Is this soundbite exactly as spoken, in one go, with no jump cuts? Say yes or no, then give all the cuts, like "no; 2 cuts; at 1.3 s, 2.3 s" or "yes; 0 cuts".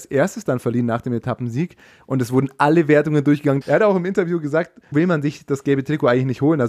no; 2 cuts; at 3.6 s, 4.9 s